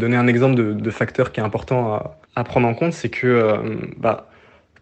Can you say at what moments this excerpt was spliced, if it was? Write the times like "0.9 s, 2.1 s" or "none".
2.2 s